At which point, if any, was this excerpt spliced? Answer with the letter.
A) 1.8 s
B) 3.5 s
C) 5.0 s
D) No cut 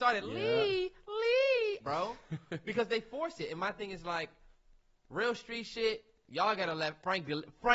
A